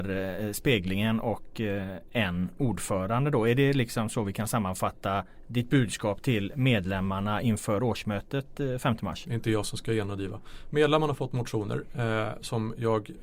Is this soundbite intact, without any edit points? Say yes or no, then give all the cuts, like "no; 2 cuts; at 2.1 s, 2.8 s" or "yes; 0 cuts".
yes; 0 cuts